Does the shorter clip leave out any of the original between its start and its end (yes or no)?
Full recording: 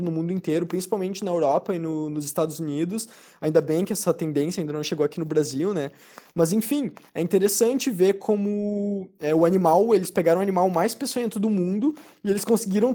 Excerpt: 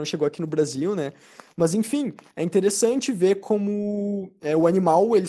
no